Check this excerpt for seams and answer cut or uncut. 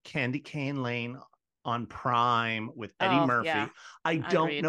uncut